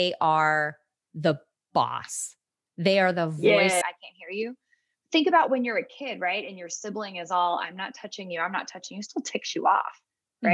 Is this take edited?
yes; 1 cut; at 3.8 s

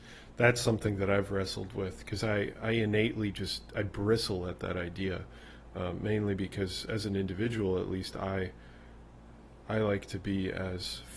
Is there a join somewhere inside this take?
no; 0 cuts

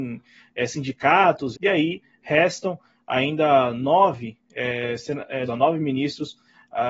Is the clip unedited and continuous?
no; 2 cuts; at 1.5 s, 5.5 s

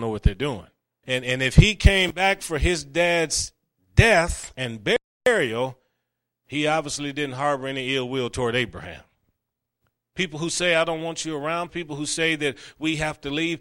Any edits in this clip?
yes; 3 cuts; at 1.0 s, 10.0 s, 11.7 s

